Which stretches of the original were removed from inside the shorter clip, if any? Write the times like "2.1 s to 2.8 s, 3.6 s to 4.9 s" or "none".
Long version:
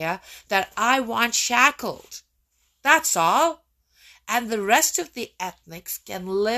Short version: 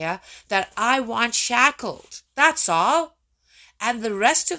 2.3 s to 2.7 s